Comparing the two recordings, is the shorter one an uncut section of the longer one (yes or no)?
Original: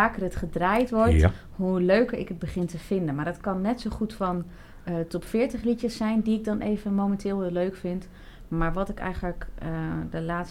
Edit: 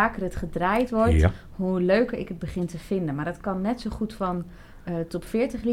yes